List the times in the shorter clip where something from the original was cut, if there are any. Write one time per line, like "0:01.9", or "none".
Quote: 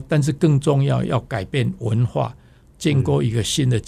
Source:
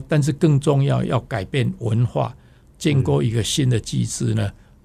none